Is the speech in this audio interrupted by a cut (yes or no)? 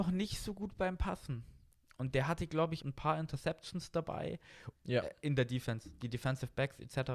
yes